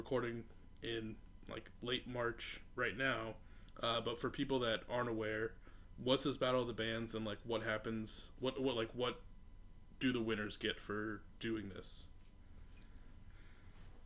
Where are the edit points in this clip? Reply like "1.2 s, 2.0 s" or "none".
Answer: none